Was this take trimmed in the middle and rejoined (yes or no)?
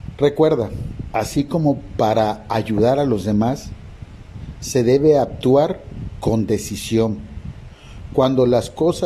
yes